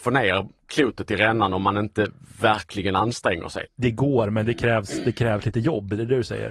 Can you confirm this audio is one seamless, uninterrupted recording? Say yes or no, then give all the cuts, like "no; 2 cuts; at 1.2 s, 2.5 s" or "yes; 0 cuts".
no; 1 cut; at 3.7 s